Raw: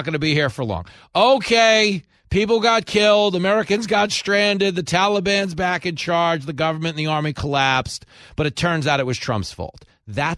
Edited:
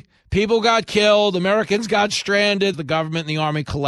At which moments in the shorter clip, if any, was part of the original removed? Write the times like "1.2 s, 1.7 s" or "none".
2.7 s